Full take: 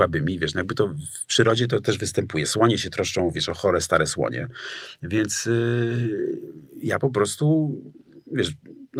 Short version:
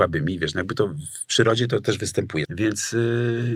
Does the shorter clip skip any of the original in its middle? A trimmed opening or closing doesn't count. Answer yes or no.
yes